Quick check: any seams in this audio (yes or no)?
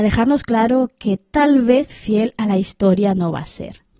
yes